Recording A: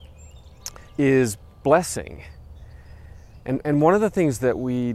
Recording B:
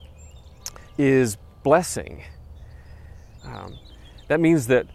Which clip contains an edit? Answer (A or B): B